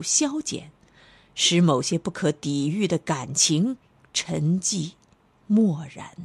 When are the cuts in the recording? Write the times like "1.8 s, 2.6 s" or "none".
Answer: none

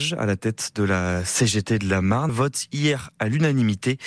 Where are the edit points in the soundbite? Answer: 2.3 s

